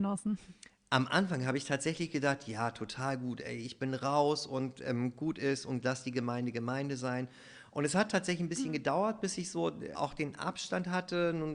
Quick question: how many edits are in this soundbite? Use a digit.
1